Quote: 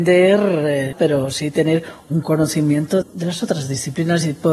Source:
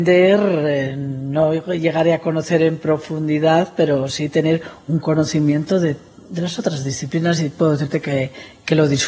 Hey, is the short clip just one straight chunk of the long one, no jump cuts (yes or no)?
no